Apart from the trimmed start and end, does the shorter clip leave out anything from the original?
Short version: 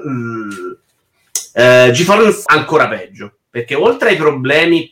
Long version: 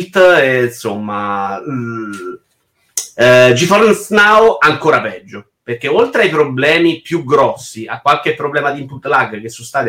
yes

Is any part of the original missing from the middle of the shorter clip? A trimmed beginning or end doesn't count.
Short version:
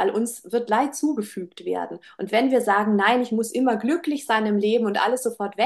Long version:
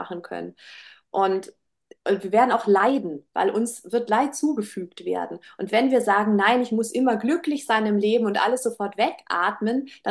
no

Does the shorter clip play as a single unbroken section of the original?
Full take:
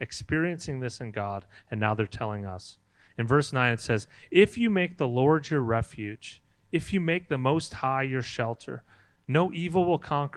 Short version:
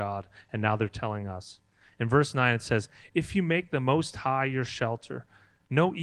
no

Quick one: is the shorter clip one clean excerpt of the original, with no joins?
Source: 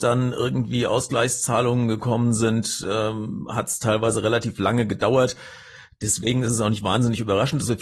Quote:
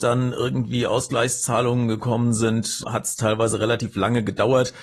no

